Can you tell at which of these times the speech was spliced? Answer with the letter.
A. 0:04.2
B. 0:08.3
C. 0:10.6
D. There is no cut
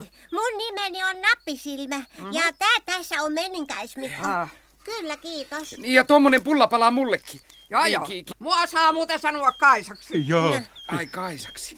B